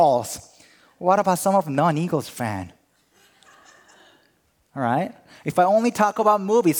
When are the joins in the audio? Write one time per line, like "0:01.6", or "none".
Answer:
none